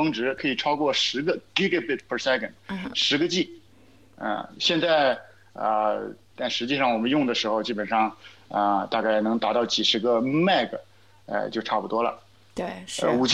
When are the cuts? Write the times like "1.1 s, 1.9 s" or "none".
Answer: 6.3 s